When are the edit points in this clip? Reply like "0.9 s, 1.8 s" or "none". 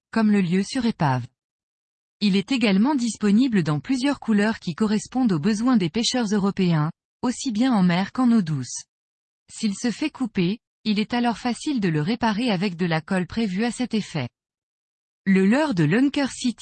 9.3 s, 10.7 s